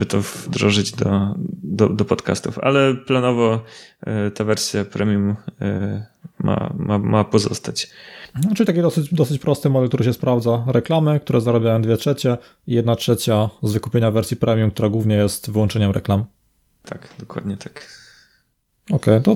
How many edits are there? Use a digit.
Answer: 0